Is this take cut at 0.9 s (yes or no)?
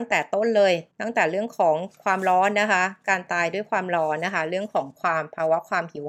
yes